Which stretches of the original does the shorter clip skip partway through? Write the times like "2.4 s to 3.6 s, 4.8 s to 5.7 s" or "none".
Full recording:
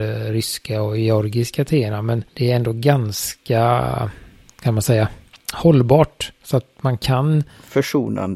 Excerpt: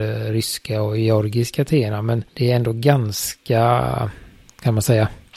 none